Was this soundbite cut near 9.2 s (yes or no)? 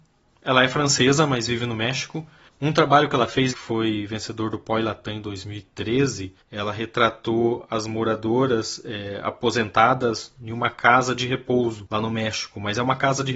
no